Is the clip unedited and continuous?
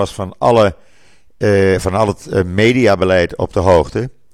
yes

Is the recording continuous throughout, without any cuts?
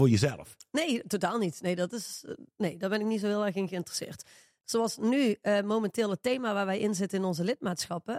no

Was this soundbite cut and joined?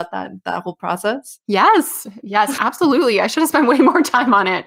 yes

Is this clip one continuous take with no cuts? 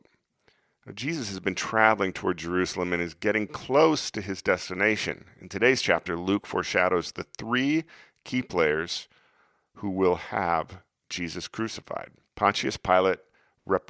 no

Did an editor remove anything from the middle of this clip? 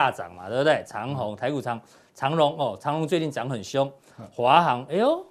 no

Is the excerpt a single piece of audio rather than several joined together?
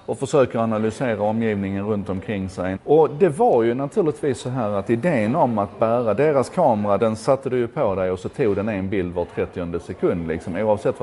no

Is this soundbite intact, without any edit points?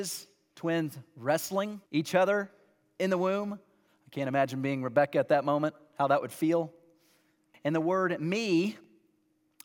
no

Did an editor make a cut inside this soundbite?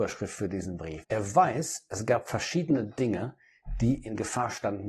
yes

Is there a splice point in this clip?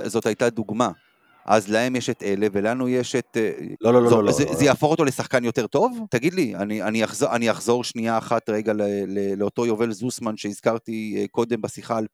yes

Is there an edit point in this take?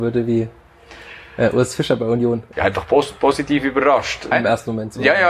yes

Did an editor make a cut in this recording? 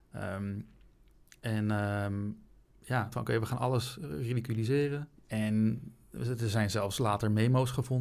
yes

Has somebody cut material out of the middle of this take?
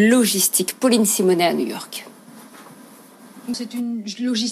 yes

